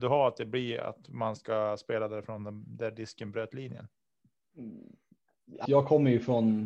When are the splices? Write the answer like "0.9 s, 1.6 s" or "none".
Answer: 5.7 s

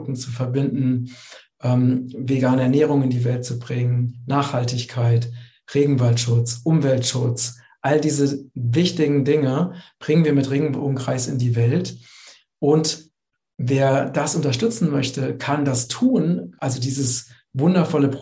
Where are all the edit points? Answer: none

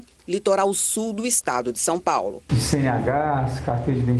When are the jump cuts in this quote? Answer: 2.5 s

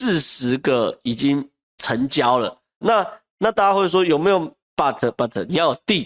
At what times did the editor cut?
2.8 s, 4.6 s

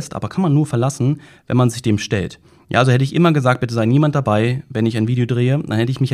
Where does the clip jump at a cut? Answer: none

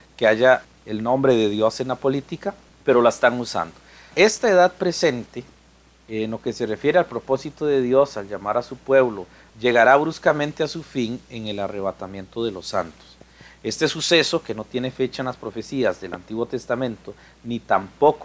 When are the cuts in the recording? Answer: 9.5 s

